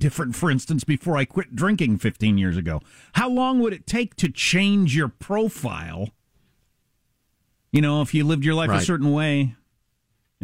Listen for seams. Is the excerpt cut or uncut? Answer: uncut